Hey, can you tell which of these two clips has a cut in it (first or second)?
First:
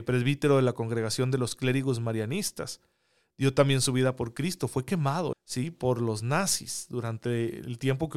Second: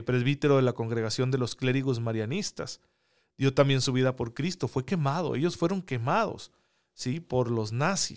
first